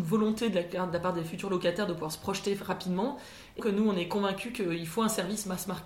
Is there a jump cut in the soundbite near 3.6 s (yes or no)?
yes